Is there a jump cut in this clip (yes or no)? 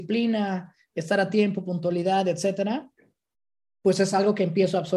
no